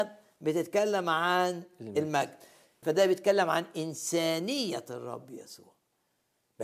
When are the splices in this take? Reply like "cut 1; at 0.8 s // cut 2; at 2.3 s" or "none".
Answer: cut 1; at 2.8 s